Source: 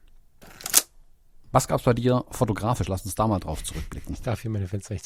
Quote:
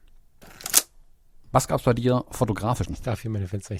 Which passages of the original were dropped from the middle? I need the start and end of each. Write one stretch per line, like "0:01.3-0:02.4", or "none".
0:02.9-0:04.1